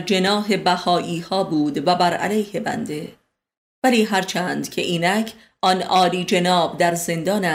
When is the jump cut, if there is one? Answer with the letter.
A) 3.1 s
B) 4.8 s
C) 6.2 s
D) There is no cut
D